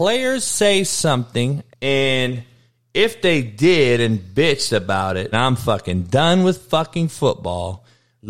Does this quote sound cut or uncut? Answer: cut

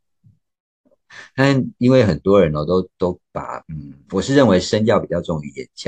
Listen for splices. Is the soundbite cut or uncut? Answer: cut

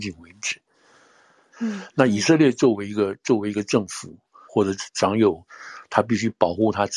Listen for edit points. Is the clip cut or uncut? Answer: cut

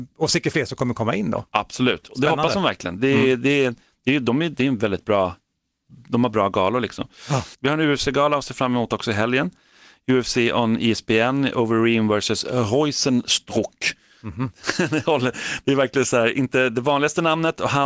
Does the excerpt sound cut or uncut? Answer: uncut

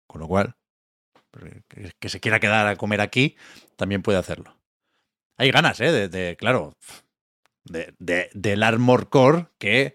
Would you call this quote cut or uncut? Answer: uncut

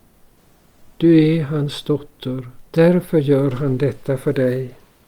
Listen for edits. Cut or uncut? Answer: cut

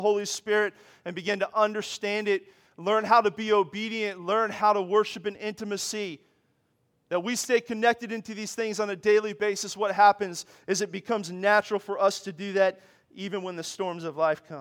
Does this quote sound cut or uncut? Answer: uncut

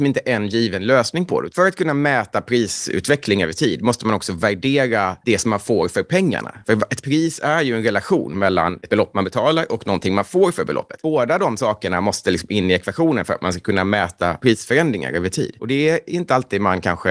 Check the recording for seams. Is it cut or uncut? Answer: uncut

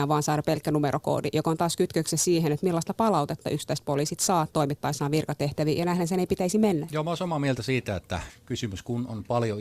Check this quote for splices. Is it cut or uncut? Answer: cut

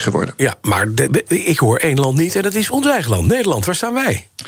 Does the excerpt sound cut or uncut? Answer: cut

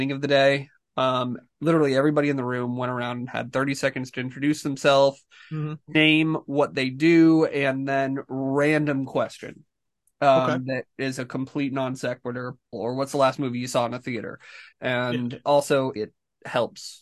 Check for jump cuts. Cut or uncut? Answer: cut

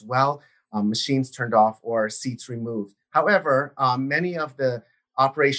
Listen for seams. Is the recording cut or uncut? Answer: uncut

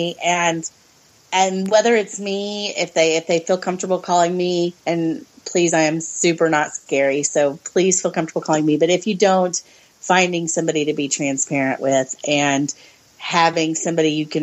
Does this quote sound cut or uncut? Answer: cut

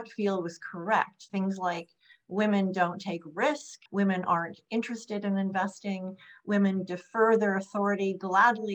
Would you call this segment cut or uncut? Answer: cut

